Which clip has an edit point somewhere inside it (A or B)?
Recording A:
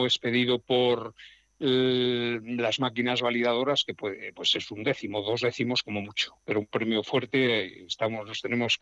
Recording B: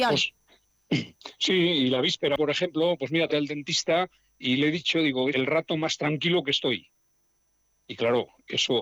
B